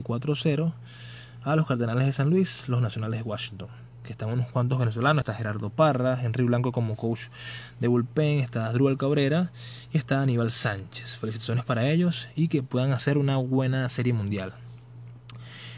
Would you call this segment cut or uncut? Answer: uncut